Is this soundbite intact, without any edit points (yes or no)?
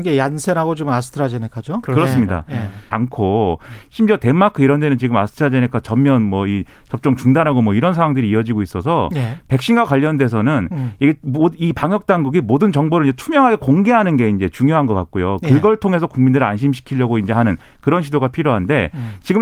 no